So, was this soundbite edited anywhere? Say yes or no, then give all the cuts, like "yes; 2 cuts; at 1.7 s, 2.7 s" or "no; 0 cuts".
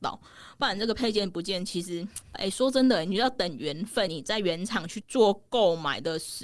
yes; 2 cuts; at 2.3 s, 4.1 s